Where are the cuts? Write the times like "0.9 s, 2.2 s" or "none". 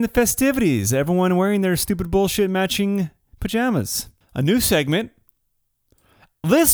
4.2 s

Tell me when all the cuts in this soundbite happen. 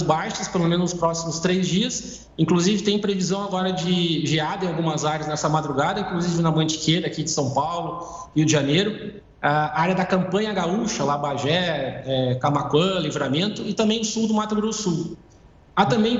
2.3 s

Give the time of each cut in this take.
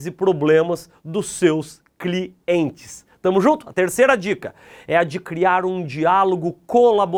none

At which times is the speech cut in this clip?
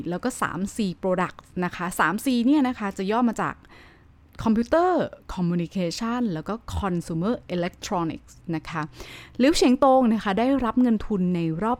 none

